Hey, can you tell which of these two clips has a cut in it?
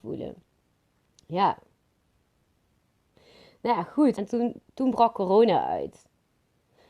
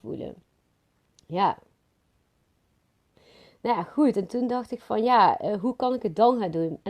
first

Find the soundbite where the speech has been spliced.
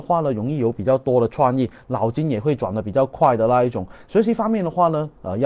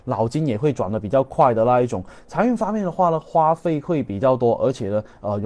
first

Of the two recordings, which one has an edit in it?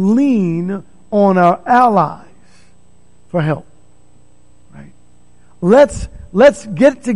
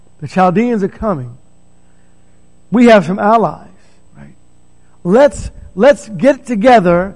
second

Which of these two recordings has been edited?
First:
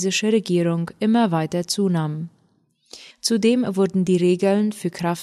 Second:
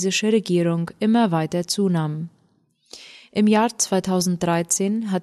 first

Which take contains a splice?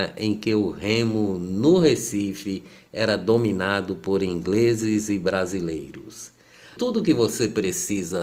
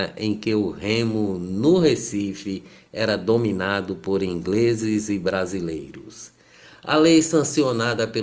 first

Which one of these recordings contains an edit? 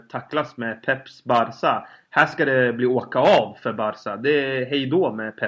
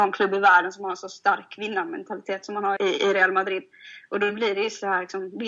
second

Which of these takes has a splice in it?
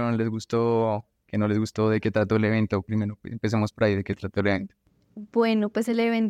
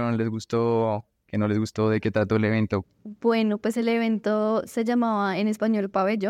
second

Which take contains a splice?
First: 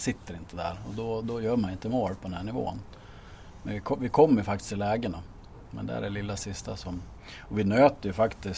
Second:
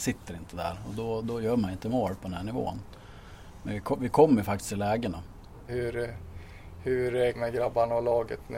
second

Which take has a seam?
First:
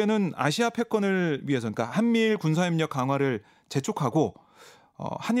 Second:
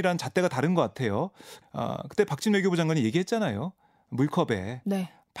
second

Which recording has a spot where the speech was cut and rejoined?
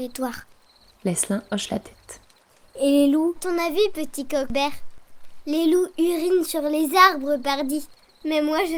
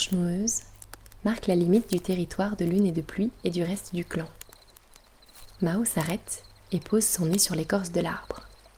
first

